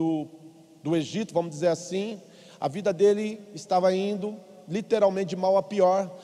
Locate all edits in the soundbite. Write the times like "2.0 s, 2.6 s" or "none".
none